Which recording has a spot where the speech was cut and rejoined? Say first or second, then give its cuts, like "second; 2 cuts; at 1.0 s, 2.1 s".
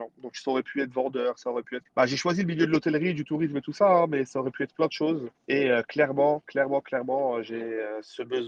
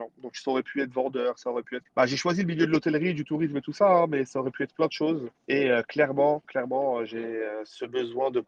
second; 1 cut; at 6.4 s